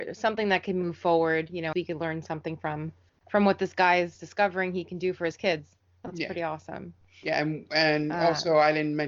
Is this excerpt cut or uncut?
cut